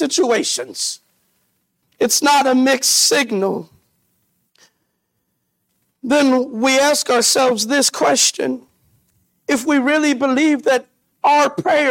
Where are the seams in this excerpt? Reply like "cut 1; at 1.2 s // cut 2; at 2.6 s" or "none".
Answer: cut 1; at 1.8 s